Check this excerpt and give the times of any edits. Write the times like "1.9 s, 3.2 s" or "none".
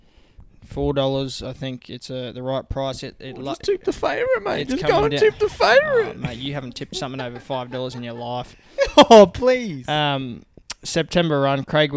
none